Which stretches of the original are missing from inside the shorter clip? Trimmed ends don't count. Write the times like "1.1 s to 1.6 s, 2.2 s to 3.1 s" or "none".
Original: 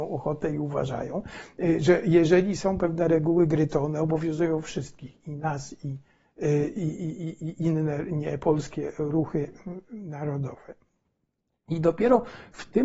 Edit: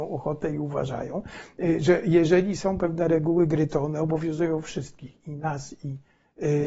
none